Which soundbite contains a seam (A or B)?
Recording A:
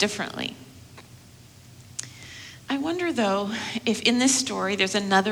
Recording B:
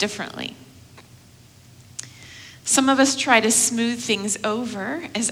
A